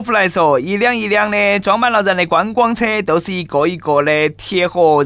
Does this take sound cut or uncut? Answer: uncut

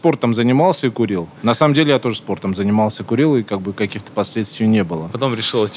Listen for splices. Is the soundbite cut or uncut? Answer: cut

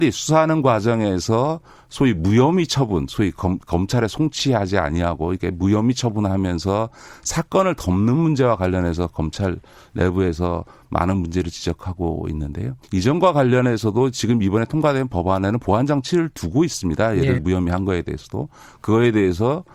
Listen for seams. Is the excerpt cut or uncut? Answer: cut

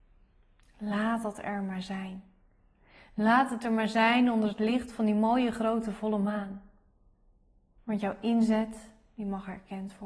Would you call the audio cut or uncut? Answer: cut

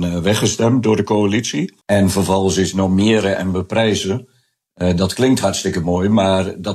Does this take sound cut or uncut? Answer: cut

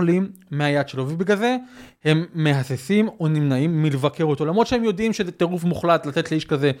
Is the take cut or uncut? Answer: uncut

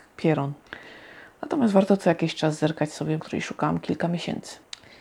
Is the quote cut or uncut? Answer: cut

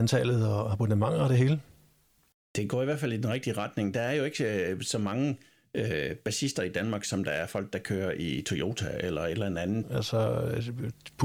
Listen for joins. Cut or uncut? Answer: cut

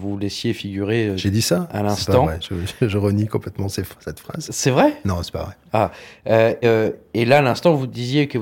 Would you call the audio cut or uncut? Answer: cut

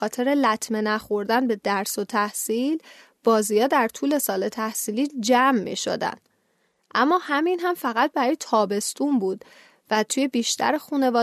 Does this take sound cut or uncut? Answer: cut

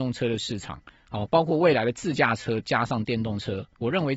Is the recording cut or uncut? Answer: uncut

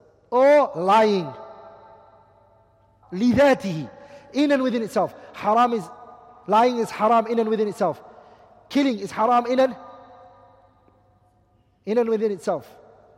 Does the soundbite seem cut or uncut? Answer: cut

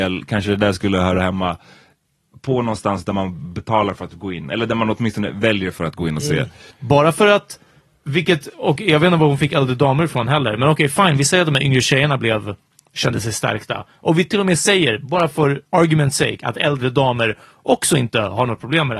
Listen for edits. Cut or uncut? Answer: cut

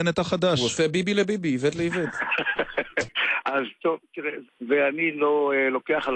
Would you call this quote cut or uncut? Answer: cut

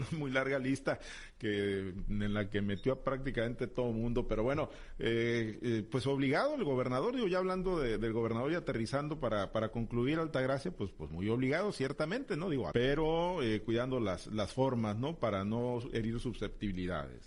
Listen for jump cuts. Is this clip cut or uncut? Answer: cut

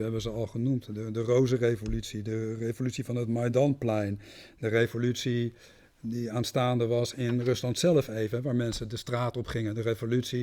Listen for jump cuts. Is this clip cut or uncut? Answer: uncut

